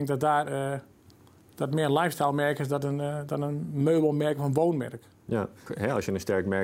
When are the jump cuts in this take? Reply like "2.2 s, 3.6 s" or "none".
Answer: 5.7 s